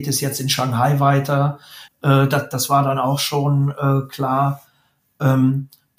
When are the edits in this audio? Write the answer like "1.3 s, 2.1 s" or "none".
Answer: 1.9 s